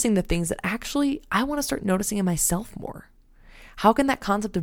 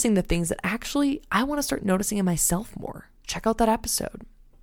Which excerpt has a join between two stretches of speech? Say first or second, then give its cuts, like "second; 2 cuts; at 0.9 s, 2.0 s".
second; 1 cut; at 3.2 s